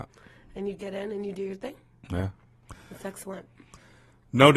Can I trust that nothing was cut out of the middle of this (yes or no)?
yes